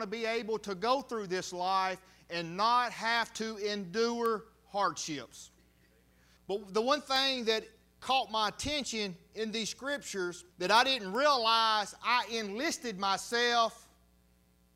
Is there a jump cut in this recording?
yes; 2 cuts; at 6.4 s, 10.5 s

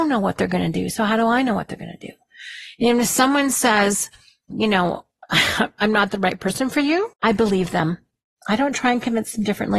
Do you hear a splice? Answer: yes; 2 cuts; at 4.5 s, 7.1 s

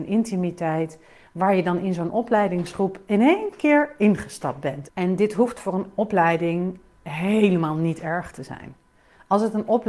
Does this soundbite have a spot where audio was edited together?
yes; 1 cut; at 4.9 s

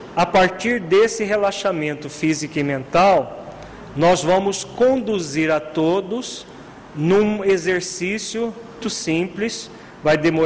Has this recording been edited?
yes; 1 cut; at 8.8 s

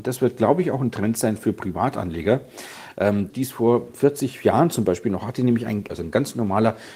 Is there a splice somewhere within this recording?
yes; 2 cuts; at 3.3 s, 5.9 s

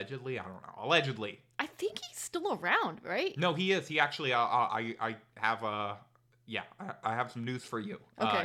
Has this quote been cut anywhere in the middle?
no; 0 cuts

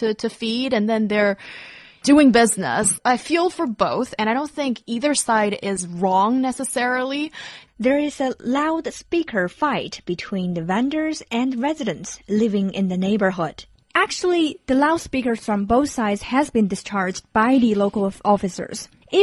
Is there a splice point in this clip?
yes; 2 cuts; at 7.7 s, 13.9 s

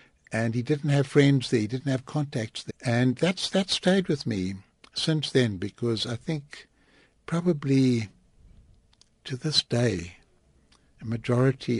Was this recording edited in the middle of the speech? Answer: yes; 1 cut; at 2.7 s

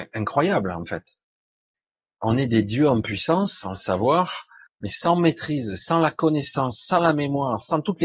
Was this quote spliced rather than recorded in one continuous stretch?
no; 0 cuts

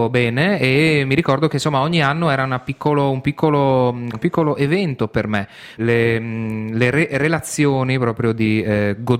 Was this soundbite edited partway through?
yes; 2 cuts; at 4.1 s, 5.8 s

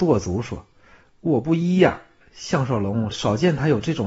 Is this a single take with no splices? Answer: no; 1 cut; at 3.1 s

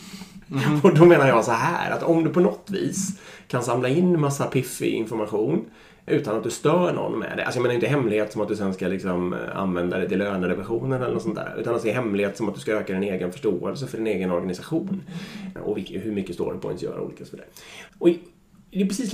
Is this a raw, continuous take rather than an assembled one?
no; 3 cuts; at 6.1 s, 15.6 s, 17.9 s

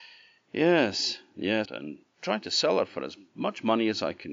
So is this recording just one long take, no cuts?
no; 1 cut; at 1.7 s

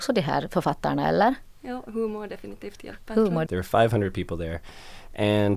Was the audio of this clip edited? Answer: yes; 1 cut; at 3.5 s

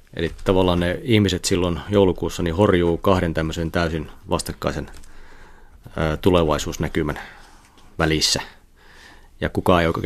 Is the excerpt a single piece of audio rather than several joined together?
no; 1 cut; at 4.2 s

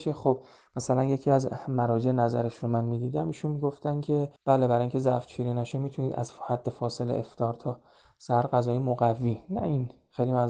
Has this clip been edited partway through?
yes; 1 cut; at 4.4 s

